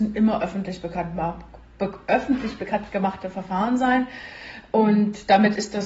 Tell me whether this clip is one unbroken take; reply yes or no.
yes